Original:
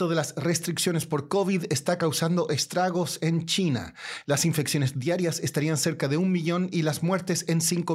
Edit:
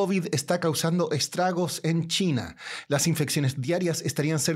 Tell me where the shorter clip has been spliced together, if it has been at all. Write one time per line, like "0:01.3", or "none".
none